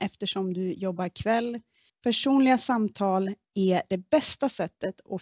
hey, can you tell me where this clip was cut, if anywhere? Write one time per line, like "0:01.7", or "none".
0:01.9

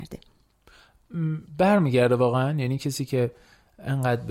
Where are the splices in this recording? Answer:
none

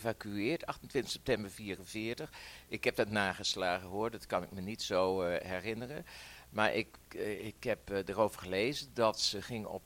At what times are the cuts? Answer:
none

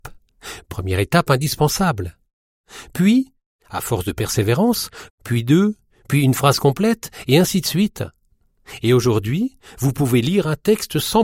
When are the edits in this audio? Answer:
0:05.1

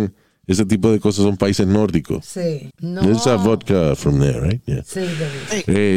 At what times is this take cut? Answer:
0:02.7

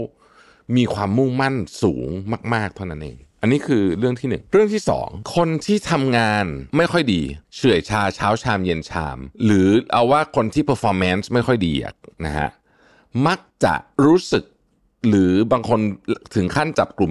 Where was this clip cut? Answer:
0:07.4

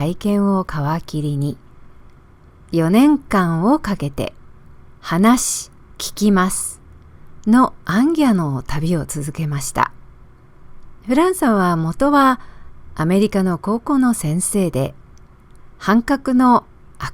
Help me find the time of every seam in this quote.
0:04.4
0:11.0
0:15.7

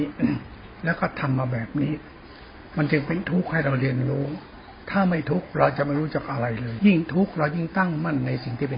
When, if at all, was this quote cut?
0:06.8

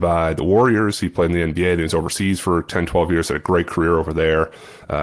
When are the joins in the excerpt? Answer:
none

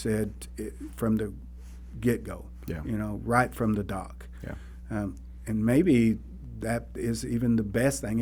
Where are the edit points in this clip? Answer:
none

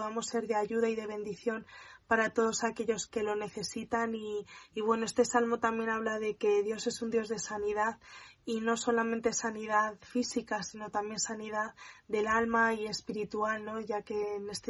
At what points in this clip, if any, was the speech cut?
0:03.1

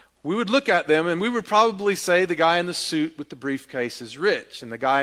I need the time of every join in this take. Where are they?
none

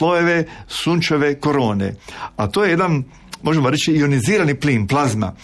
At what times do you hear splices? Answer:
none

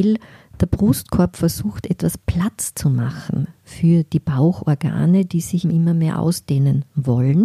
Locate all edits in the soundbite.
0:05.6

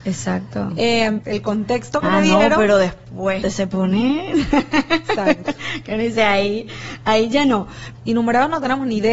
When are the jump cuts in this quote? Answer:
0:01.2
0:03.4
0:08.0

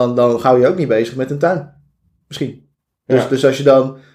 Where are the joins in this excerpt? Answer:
none

